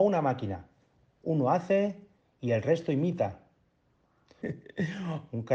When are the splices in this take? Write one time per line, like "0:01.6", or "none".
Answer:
0:04.4